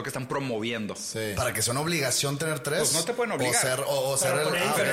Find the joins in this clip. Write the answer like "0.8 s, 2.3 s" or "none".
none